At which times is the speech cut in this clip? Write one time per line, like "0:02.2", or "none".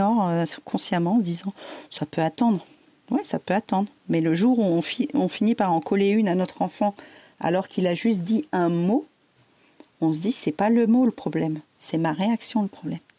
none